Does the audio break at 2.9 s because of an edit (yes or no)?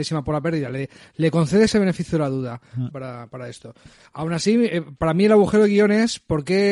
yes